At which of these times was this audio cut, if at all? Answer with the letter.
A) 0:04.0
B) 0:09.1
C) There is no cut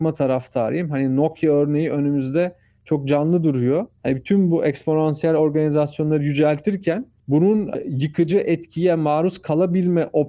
A